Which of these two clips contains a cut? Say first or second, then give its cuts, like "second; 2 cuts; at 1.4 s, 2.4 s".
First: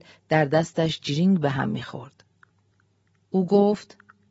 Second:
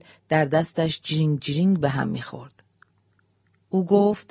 first; 1 cut; at 1.0 s